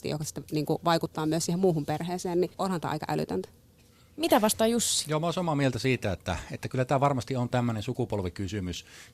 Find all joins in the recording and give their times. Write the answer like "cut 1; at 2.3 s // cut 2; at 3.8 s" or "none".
cut 1; at 2.5 s